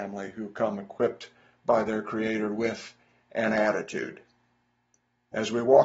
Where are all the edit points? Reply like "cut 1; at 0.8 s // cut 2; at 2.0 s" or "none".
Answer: none

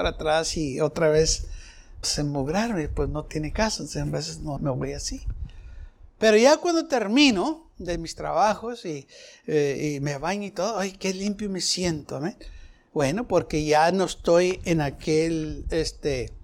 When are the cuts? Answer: cut 1; at 2.0 s // cut 2; at 4.6 s

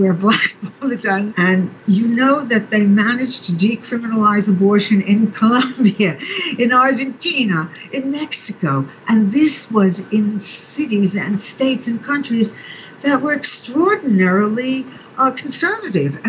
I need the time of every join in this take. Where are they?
cut 1; at 1.3 s

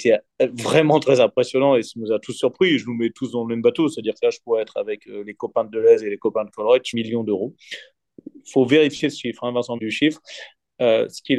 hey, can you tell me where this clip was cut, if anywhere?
cut 1; at 6.9 s // cut 2; at 9.8 s

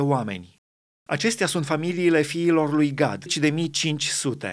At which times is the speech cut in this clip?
cut 1; at 1.1 s // cut 2; at 3.3 s

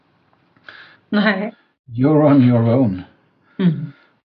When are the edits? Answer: cut 1; at 1.0 s

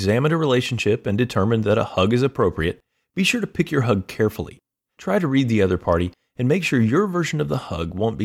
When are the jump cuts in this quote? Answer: none

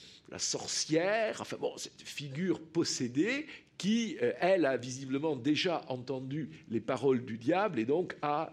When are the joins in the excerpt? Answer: none

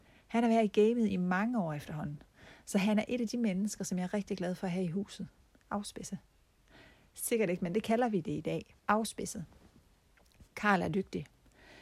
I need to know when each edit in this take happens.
cut 1; at 5.6 s // cut 2; at 8.8 s

